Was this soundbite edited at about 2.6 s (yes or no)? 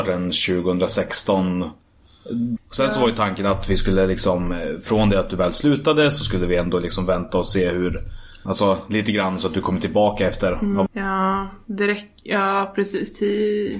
yes